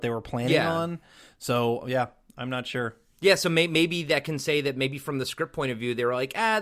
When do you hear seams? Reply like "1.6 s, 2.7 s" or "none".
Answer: none